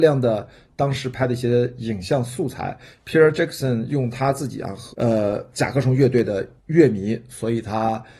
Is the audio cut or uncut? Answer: cut